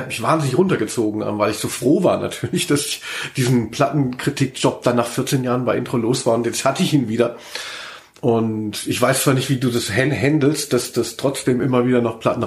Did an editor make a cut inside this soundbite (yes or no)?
no